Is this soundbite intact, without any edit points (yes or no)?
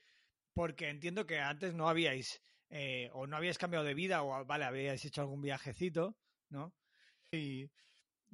no